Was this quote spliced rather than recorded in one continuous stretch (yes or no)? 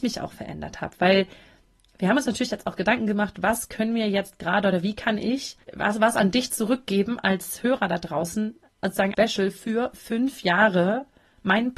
yes